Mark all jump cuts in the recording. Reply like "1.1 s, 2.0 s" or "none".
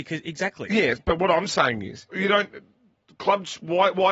1.0 s, 2.1 s